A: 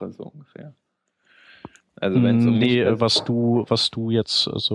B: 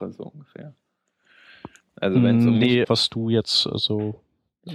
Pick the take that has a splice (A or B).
B